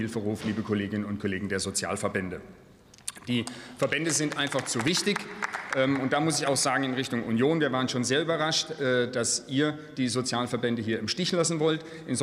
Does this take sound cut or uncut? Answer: uncut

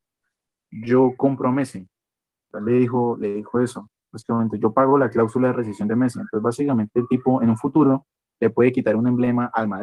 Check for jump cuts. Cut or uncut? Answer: uncut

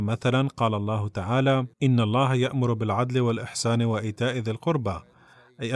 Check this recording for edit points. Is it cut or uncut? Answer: cut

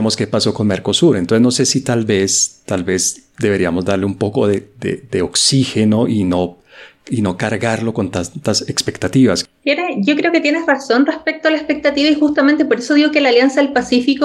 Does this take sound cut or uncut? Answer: uncut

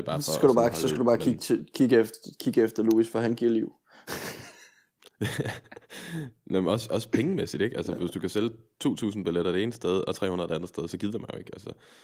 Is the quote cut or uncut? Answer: uncut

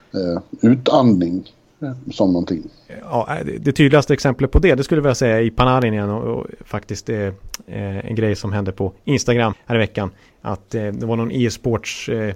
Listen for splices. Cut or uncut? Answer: cut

